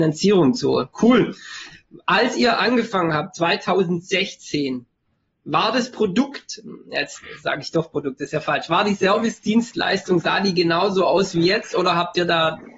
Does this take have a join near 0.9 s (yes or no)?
no